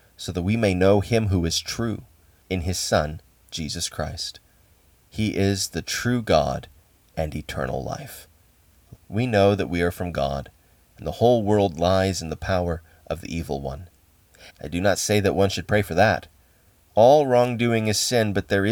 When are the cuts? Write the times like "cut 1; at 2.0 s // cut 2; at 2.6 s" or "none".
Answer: cut 1; at 2.4 s // cut 2; at 9.0 s // cut 3; at 14.5 s